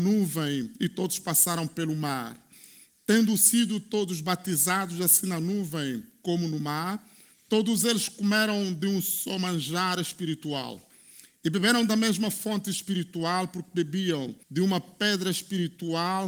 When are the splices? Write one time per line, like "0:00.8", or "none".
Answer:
0:07.3
0:14.4